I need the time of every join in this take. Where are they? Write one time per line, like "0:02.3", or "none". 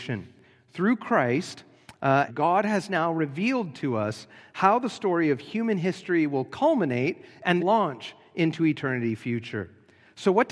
0:02.3
0:07.6